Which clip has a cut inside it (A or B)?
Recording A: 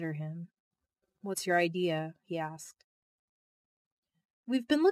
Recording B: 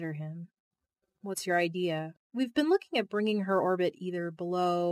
B